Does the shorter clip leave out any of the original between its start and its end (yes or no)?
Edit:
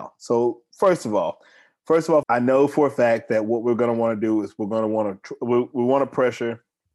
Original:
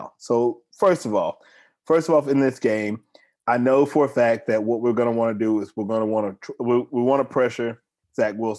yes